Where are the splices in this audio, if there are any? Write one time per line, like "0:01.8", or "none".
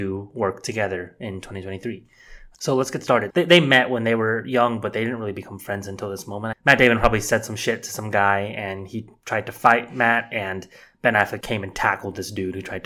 0:03.3
0:06.5
0:11.4